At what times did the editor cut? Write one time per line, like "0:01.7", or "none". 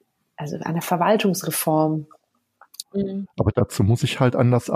0:02.8